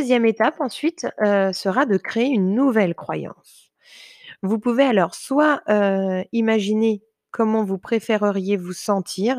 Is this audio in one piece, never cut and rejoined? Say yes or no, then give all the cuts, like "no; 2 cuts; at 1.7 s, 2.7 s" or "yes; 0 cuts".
yes; 0 cuts